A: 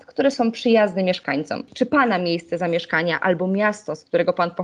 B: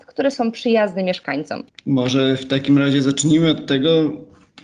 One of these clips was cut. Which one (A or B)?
B